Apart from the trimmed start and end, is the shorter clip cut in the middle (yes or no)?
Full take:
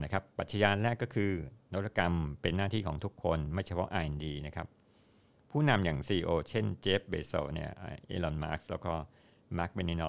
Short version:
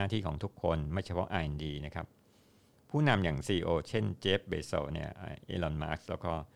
no